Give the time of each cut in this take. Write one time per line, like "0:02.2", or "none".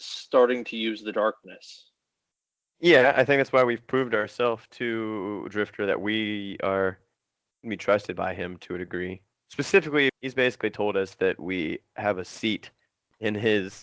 0:10.1